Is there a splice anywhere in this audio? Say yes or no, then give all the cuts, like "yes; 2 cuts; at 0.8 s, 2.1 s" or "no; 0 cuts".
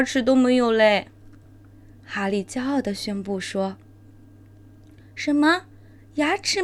no; 0 cuts